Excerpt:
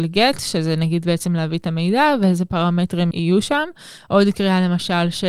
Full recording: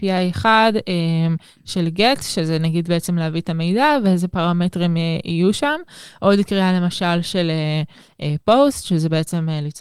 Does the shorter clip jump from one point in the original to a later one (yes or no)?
yes